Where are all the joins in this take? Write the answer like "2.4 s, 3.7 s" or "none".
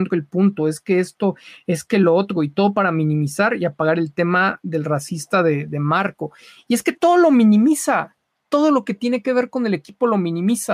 none